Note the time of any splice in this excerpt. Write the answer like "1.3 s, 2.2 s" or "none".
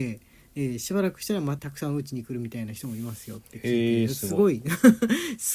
1.6 s